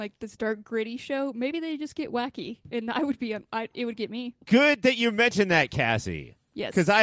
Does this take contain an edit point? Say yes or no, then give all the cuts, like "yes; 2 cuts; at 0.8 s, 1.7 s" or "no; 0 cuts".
yes; 1 cut; at 4.4 s